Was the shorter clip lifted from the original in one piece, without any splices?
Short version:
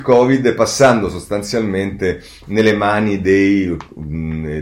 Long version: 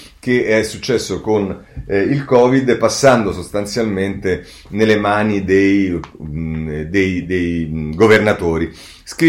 yes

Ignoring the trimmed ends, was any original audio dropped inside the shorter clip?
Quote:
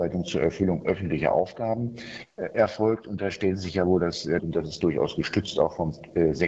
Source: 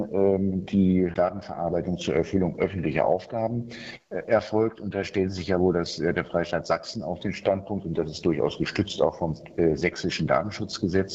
yes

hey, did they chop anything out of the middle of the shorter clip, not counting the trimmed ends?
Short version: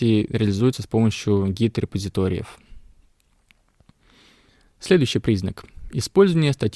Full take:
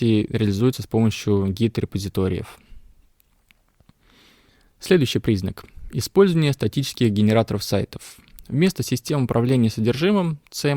no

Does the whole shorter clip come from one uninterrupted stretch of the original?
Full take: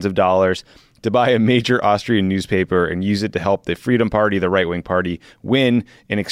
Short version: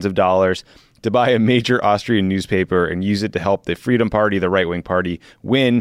yes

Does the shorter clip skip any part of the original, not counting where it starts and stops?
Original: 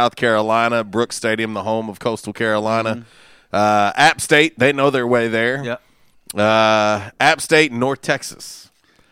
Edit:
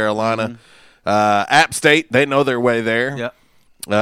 no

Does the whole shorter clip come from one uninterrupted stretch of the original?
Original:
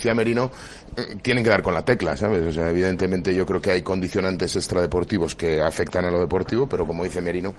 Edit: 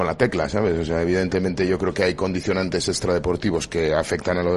yes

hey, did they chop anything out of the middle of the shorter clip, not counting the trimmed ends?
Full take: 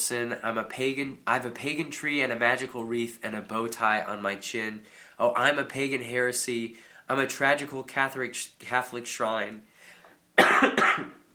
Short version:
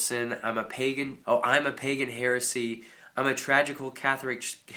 yes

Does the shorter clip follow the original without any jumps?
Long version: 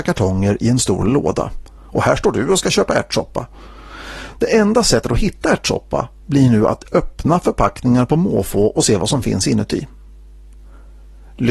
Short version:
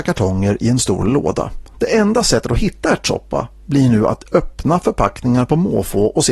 no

